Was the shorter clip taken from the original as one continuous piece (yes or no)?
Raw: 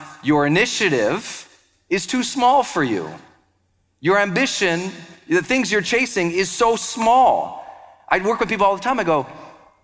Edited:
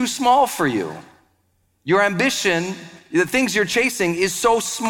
yes